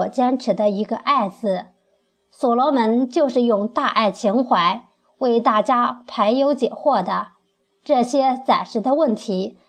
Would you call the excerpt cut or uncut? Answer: uncut